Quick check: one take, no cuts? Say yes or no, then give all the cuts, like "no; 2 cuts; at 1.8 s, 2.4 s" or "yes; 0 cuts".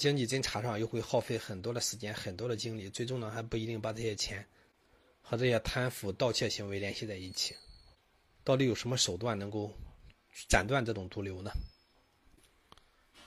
yes; 0 cuts